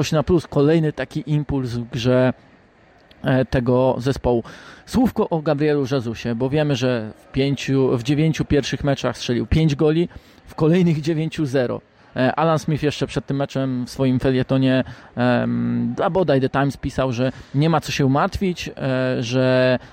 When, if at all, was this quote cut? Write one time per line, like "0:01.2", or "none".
none